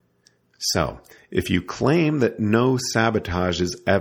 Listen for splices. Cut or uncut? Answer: uncut